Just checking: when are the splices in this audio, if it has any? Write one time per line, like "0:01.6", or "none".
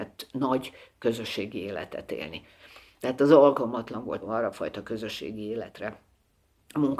0:02.9
0:04.2